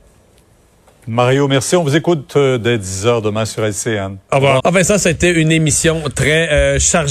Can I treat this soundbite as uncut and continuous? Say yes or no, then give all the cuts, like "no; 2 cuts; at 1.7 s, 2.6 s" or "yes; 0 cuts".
no; 1 cut; at 4.6 s